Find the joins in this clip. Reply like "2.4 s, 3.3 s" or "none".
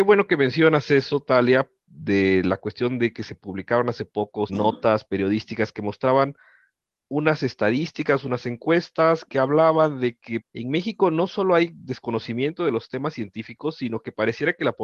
4.5 s, 10.4 s